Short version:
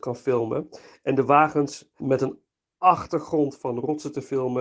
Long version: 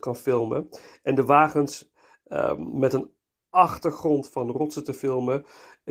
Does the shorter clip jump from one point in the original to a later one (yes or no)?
yes